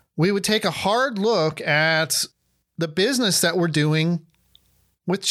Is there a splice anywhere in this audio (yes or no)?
no